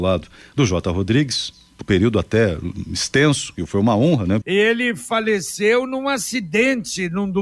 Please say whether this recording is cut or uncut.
cut